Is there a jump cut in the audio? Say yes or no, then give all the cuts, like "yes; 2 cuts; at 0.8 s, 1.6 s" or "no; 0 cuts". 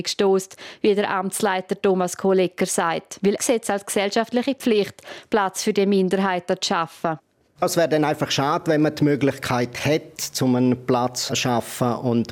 yes; 1 cut; at 3.4 s